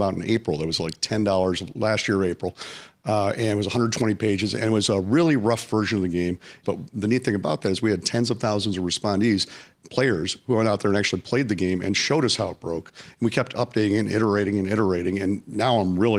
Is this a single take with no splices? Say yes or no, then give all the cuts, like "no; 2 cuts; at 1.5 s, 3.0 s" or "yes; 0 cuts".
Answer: no; 1 cut; at 6.6 s